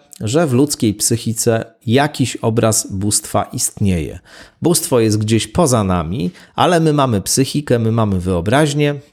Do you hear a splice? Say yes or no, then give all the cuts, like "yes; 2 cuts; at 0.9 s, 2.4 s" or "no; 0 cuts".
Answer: no; 0 cuts